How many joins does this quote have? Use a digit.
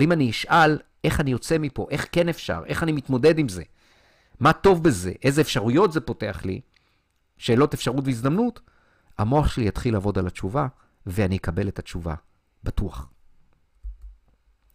0